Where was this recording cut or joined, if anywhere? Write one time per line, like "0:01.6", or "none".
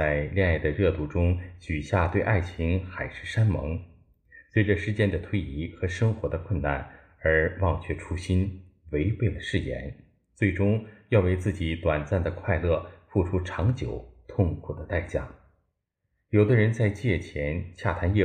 none